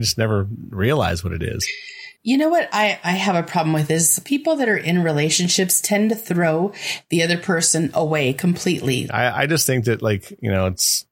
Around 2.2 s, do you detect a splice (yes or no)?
yes